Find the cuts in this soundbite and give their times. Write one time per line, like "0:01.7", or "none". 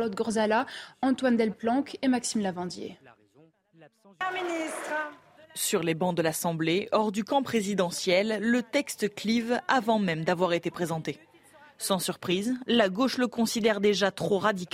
0:05.4